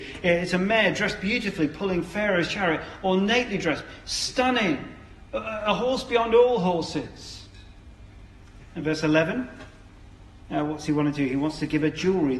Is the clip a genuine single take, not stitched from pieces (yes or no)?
yes